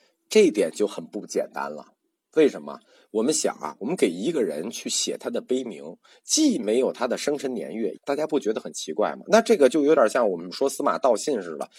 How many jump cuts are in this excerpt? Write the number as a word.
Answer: one